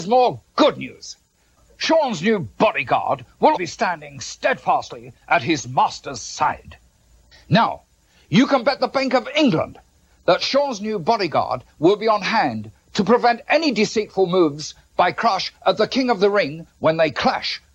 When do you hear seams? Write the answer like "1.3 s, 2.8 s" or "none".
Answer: 3.5 s